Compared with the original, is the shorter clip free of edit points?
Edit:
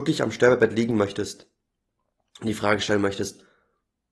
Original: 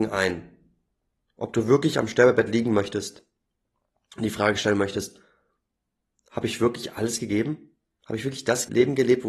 yes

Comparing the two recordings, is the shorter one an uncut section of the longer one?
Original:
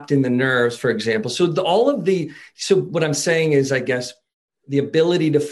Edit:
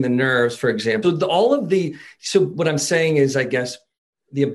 no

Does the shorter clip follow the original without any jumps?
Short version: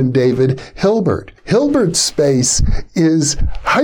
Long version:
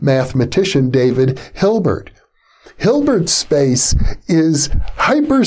no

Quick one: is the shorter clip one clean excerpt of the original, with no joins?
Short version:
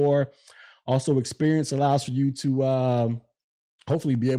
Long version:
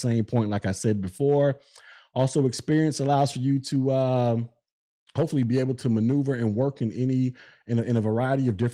yes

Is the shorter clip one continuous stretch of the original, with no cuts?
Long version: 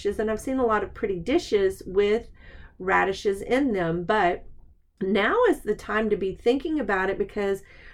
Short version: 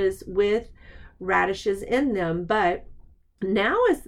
yes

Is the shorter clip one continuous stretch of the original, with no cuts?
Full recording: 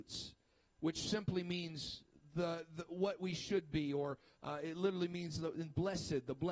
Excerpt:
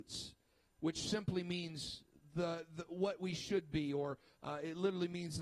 yes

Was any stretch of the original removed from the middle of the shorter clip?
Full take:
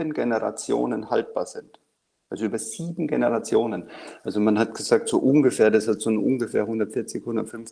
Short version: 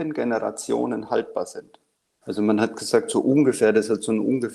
yes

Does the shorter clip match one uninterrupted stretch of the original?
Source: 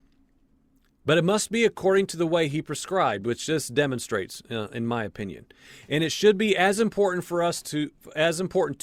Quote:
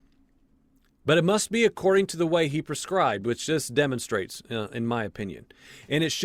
yes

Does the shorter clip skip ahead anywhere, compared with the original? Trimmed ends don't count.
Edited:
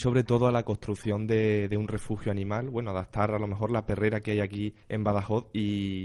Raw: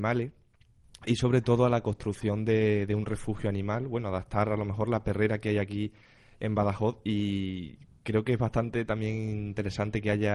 yes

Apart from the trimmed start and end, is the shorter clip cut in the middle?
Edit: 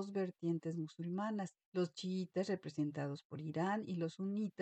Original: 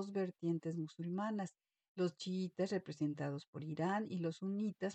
yes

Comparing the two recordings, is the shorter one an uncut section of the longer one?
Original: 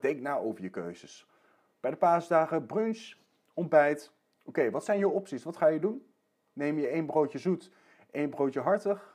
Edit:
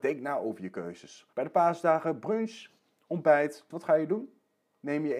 no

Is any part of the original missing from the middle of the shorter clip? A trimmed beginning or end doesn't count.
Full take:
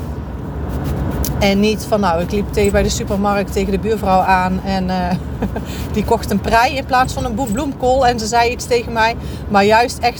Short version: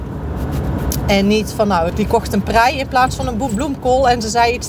yes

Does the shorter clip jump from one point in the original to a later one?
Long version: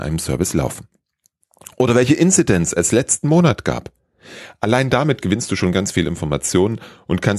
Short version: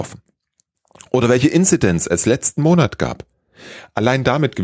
no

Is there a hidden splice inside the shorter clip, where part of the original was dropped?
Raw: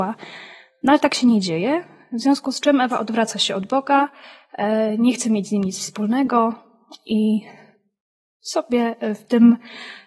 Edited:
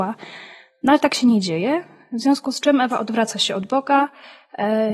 no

